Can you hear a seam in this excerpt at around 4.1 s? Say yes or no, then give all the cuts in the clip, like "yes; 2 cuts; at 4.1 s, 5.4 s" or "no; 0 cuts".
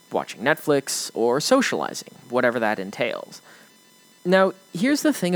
no; 0 cuts